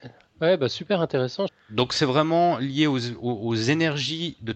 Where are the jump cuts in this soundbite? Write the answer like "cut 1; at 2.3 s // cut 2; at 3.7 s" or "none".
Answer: cut 1; at 1.5 s